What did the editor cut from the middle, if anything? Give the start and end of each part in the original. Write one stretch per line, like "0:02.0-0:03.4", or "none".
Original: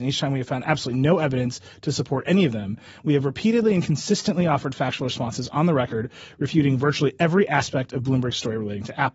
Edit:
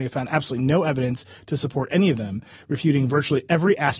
0:03.0-0:06.3